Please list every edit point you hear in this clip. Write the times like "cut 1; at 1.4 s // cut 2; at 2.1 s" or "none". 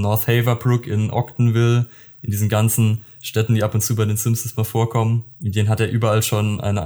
cut 1; at 5.3 s